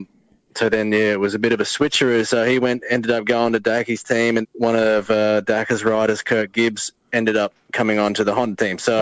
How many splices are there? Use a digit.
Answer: 1